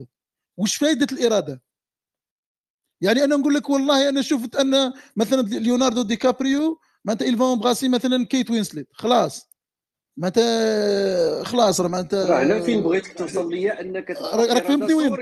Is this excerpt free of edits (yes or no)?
yes